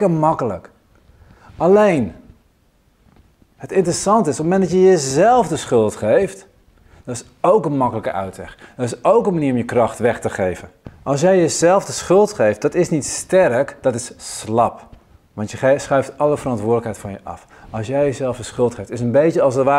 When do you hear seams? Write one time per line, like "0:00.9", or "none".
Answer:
none